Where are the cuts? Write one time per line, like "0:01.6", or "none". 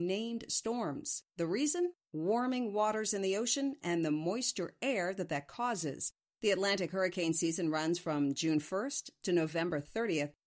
none